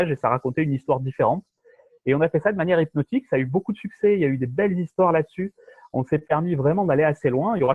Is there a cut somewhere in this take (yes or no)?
no